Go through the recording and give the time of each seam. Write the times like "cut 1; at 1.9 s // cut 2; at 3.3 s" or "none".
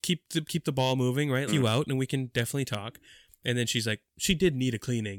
cut 1; at 1.5 s